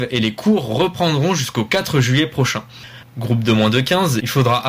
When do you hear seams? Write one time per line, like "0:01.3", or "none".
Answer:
0:03.0